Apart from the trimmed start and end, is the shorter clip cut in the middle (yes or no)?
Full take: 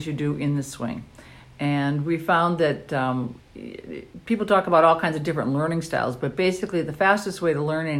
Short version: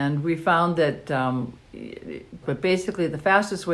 yes